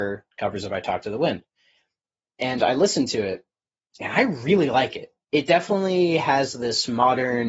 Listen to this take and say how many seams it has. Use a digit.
0